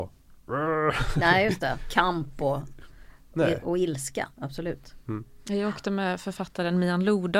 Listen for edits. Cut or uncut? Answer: cut